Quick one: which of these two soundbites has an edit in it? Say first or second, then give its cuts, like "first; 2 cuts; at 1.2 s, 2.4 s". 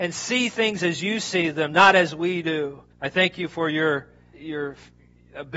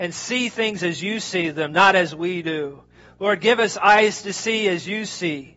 first; 2 cuts; at 2.9 s, 4.3 s